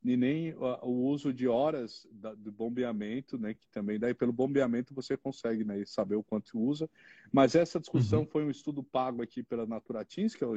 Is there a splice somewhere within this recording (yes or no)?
no